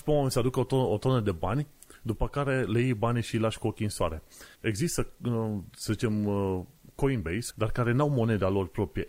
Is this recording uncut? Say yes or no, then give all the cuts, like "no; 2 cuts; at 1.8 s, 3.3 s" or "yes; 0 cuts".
no; 2 cuts; at 4.5 s, 7.5 s